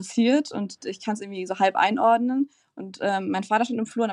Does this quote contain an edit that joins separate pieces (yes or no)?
no